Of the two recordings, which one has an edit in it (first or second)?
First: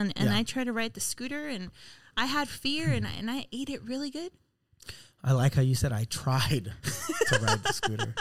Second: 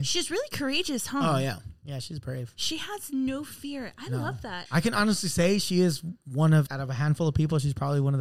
second